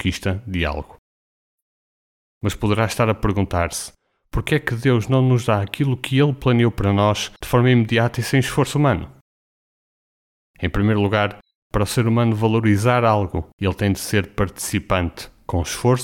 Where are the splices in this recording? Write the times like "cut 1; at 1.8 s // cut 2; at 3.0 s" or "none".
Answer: none

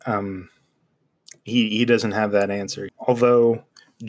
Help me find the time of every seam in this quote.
cut 1; at 2.9 s

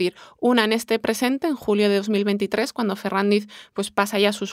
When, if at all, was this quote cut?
none

